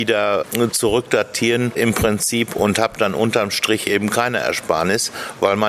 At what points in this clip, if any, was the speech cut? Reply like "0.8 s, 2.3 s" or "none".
none

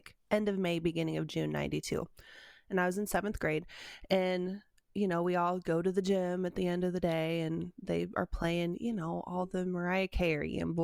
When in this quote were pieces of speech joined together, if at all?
none

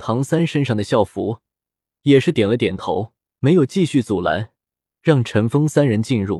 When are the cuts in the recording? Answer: none

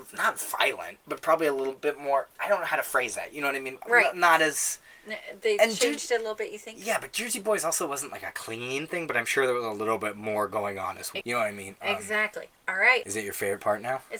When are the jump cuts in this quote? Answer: 11.2 s, 13.0 s

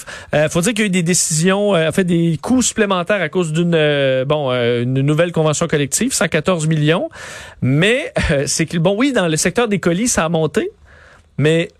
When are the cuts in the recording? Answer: none

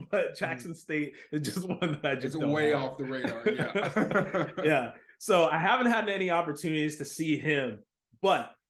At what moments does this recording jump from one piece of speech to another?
none

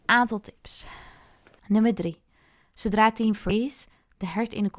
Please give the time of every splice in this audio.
1.6 s

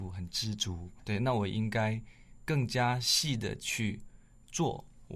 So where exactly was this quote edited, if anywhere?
none

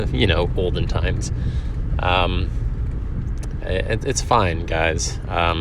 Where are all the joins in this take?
3.6 s

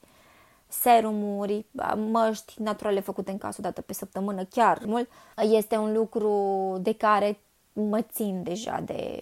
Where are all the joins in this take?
5.3 s

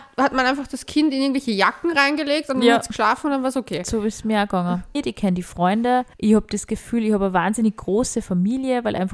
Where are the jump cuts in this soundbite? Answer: 4.9 s, 6.1 s

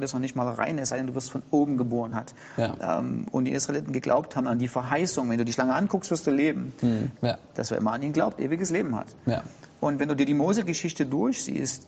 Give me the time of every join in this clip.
2.1 s, 7.2 s

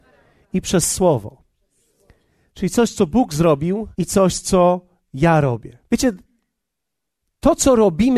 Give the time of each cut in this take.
3.9 s, 5.9 s

